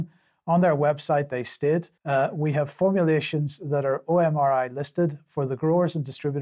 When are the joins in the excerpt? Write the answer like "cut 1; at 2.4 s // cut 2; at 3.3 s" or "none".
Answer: cut 1; at 2.0 s